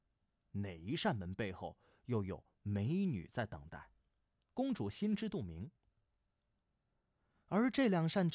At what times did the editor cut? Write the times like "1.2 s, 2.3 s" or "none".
none